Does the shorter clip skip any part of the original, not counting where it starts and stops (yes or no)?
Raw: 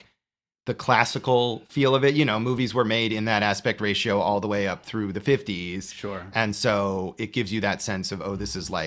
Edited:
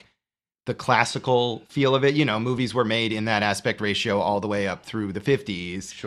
no